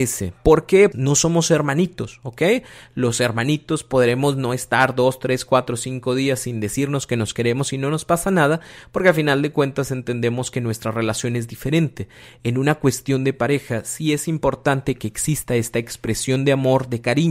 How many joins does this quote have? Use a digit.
1